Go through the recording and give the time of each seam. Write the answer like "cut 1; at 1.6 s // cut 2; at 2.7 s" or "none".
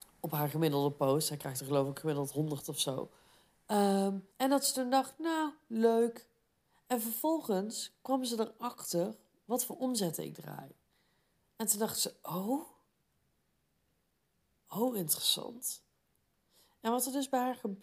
cut 1; at 4.3 s

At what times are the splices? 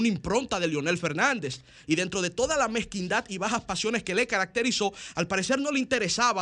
none

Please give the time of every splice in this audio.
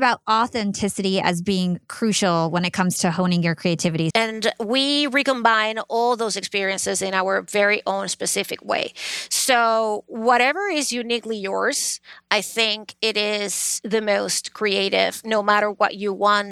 cut 1; at 4.1 s

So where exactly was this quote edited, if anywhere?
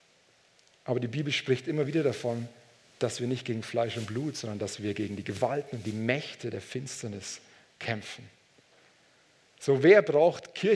none

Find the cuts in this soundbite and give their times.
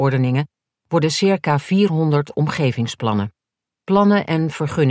cut 1; at 3.8 s

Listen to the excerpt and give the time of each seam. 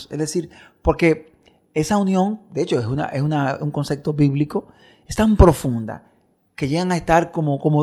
none

